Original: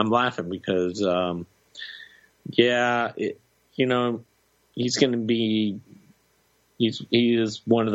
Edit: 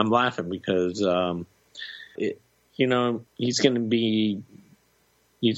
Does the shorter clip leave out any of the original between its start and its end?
yes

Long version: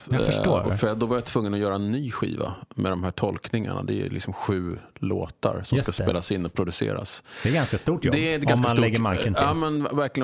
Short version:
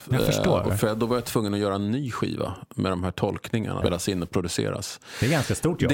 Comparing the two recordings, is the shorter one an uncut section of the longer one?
no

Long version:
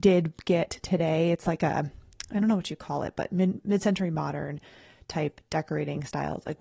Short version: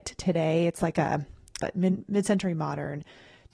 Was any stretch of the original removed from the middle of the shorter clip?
yes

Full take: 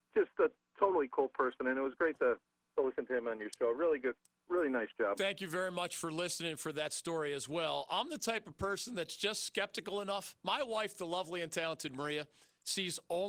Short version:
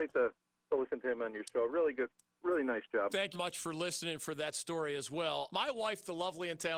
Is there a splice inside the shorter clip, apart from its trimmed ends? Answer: yes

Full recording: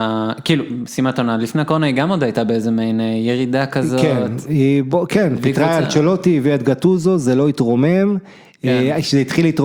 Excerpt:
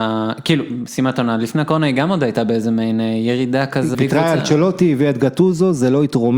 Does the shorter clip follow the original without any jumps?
no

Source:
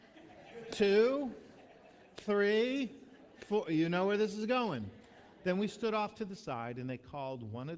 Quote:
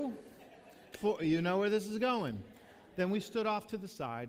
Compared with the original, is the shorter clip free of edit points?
no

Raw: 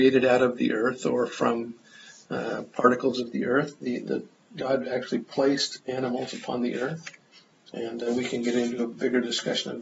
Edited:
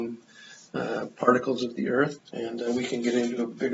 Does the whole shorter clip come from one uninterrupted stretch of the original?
no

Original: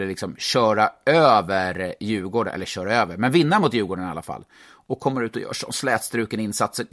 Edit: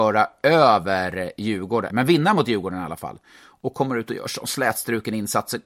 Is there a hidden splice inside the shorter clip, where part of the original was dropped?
yes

